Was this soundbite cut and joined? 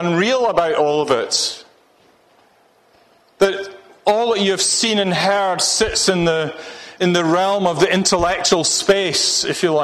no; 0 cuts

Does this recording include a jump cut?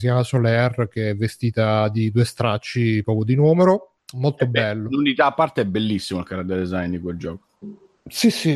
no; 0 cuts

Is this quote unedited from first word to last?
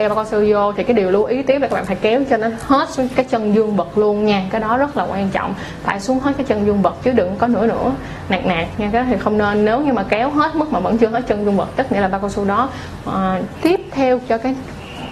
no; 1 cut; at 13.5 s

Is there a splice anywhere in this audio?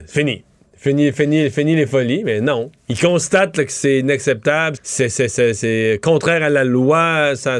yes; 2 cuts; at 2.8 s, 4.8 s

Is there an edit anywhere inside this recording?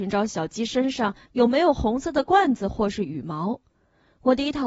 no; 0 cuts

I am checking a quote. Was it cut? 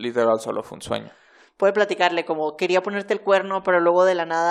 no; 0 cuts

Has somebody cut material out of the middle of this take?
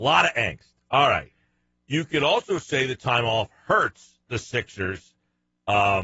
no; 0 cuts

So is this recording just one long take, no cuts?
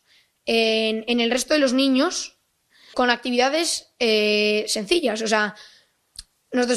no; 1 cut; at 2.9 s

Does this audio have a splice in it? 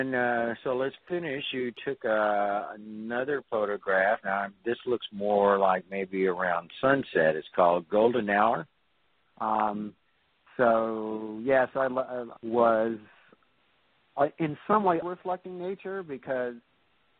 yes; 3 cuts; at 9.2 s, 12.4 s, 15.0 s

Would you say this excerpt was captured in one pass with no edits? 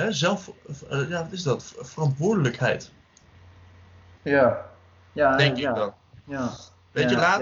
yes; 0 cuts

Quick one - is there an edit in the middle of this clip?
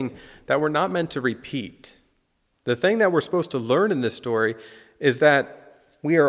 no; 0 cuts

